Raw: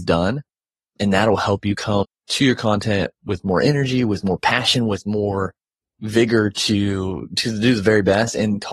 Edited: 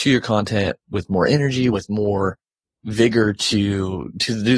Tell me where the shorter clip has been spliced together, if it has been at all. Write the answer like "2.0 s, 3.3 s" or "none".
1.7 s